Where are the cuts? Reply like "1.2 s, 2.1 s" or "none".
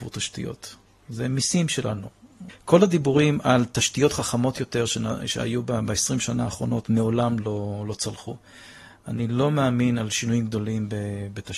none